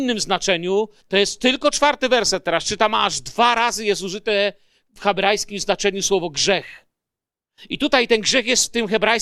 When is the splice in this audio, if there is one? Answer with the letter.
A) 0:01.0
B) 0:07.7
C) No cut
A